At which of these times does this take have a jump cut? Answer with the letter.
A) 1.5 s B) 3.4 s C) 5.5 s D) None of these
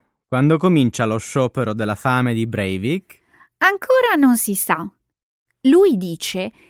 D